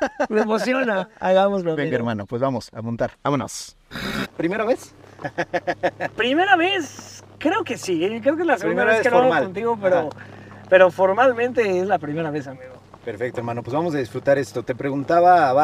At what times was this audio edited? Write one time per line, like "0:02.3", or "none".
0:03.1
0:04.2